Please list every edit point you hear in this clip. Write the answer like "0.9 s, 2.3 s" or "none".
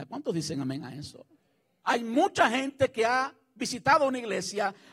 1.8 s